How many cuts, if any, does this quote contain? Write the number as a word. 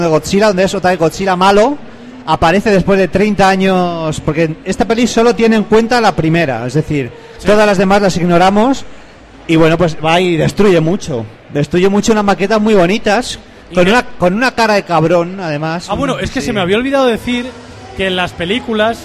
zero